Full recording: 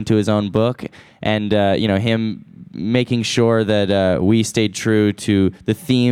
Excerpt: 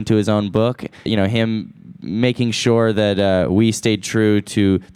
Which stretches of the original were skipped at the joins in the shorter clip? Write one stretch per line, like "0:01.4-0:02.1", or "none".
0:01.1-0:01.8